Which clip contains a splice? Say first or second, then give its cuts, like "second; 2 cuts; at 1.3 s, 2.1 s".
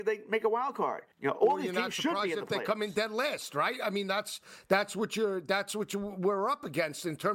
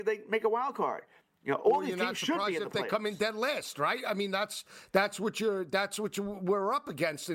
first; 1 cut; at 1.1 s